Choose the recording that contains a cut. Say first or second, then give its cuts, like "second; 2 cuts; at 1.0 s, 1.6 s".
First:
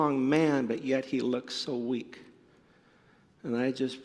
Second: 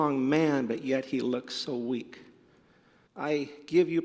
second; 1 cut; at 3.1 s